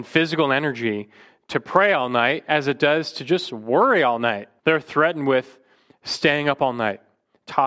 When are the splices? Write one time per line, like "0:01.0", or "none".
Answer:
0:04.6